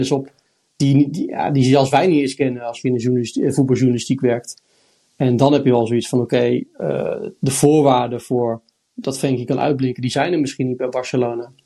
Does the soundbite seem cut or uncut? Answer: uncut